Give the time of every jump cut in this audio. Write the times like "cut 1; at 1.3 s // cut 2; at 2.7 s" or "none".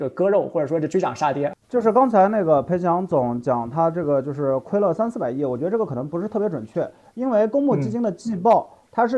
cut 1; at 1.6 s